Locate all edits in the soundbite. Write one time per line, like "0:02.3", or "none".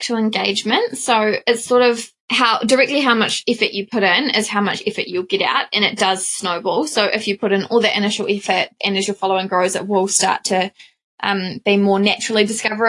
0:02.2